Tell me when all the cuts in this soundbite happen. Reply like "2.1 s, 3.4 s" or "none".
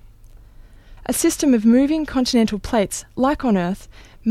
1.0 s